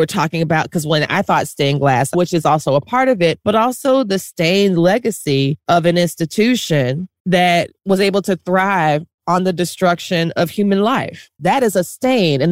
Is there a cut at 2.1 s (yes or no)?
yes